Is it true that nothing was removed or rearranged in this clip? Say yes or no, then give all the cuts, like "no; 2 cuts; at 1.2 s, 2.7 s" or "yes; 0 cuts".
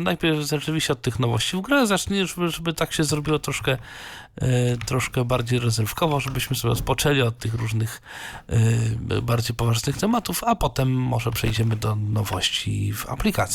yes; 0 cuts